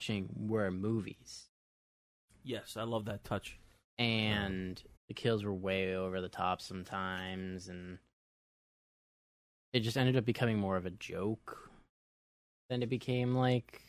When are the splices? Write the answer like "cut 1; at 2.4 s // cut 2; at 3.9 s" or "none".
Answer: cut 1; at 5.0 s